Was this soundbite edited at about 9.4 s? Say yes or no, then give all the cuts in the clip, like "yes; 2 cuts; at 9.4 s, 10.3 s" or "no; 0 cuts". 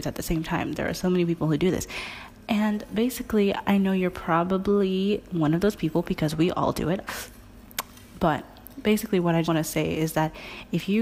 yes; 2 cuts; at 7.1 s, 9.4 s